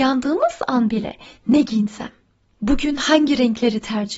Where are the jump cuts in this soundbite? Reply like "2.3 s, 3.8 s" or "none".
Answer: none